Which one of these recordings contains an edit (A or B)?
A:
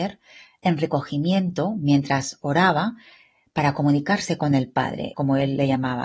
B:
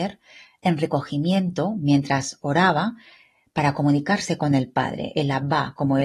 A